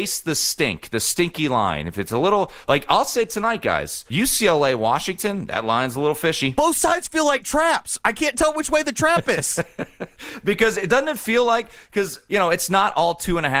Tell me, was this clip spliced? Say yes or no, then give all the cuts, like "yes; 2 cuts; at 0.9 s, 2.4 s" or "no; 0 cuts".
no; 0 cuts